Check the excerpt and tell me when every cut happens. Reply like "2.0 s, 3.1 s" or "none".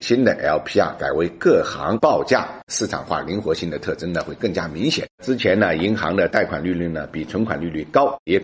2.6 s, 5.1 s